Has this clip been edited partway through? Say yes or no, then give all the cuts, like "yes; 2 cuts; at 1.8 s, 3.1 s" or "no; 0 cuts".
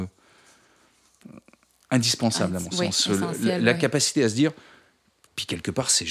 no; 0 cuts